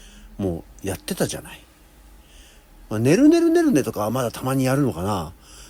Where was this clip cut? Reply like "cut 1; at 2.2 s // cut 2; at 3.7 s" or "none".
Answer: none